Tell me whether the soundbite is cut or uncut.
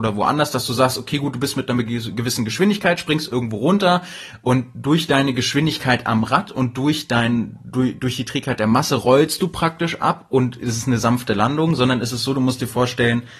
uncut